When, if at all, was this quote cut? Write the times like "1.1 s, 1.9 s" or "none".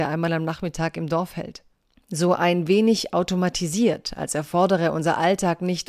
1.9 s